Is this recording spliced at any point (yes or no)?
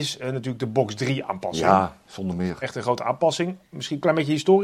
no